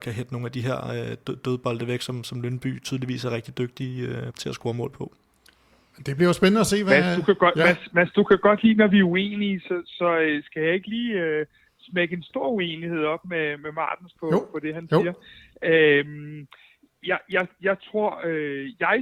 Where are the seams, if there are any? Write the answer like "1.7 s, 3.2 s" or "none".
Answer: 4.3 s